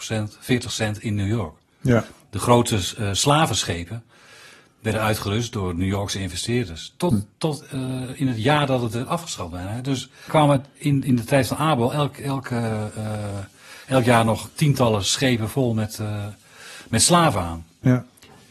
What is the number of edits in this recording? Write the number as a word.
one